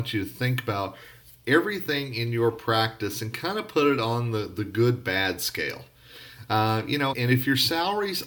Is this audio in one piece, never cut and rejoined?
no; 1 cut; at 7.1 s

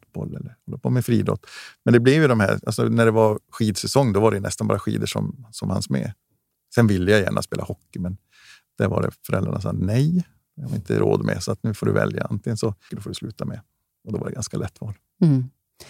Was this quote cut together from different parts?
yes; 1 cut; at 12.9 s

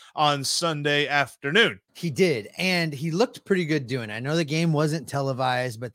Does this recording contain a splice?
yes; 1 cut; at 1.9 s

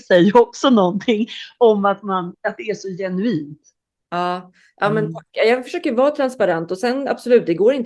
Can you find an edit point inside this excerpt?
no; 0 cuts

